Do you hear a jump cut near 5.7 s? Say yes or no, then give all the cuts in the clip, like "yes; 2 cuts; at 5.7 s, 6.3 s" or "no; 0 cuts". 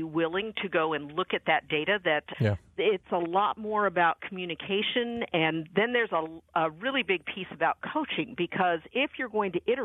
no; 1 cut; at 2.3 s